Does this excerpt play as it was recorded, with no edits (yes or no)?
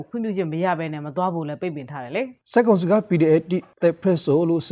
no